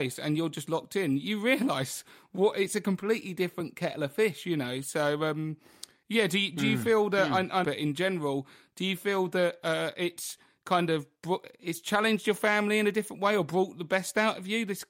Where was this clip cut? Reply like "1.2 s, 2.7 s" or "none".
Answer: 7.6 s